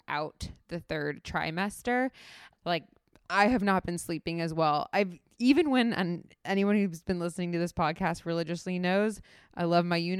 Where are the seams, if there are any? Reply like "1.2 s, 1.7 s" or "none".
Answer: 2.5 s